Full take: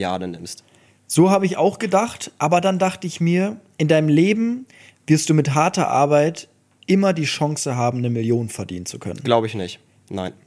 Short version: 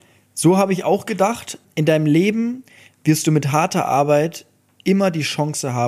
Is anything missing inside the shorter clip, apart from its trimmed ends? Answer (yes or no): yes